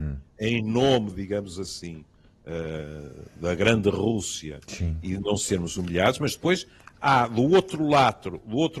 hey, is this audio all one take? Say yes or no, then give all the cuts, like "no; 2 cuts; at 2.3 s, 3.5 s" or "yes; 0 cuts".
yes; 0 cuts